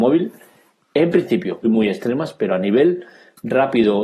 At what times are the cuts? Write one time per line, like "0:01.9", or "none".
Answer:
0:01.6